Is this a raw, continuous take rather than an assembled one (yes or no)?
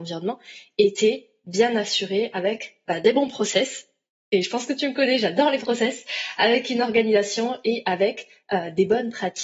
yes